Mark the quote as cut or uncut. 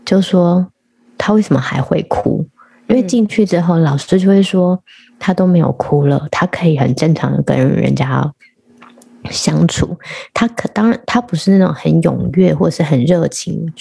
uncut